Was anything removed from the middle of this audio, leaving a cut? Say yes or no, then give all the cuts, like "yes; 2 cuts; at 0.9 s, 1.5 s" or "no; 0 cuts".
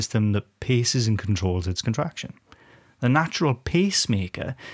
no; 0 cuts